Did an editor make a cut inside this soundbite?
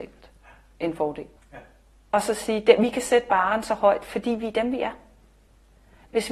yes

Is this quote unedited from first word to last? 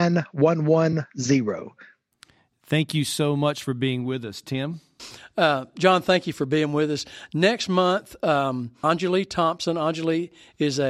no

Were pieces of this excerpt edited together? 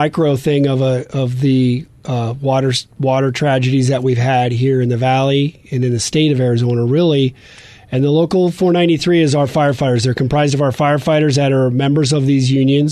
no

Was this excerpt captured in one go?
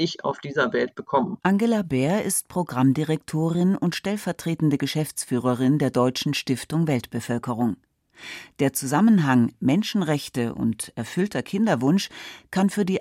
no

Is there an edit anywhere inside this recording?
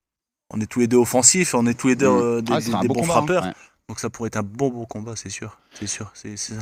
no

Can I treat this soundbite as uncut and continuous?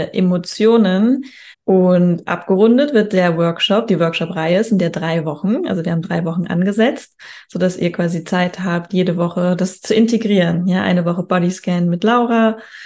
no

